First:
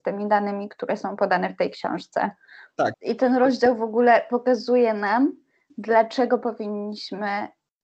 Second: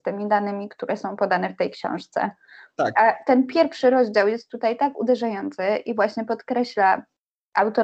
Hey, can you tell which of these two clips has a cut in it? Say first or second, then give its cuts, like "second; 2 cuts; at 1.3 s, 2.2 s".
first; 1 cut; at 2.9 s